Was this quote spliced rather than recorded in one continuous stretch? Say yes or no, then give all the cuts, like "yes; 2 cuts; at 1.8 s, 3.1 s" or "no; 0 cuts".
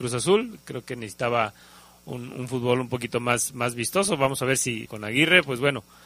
yes; 1 cut; at 4.9 s